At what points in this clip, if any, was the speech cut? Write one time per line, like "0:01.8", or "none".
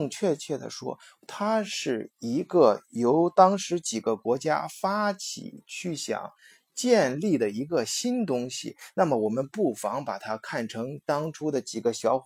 none